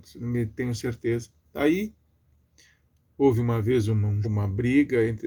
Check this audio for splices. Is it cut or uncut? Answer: cut